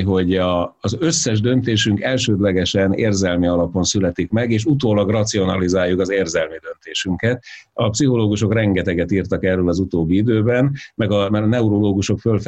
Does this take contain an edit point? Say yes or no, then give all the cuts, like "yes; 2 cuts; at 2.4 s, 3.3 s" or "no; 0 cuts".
no; 0 cuts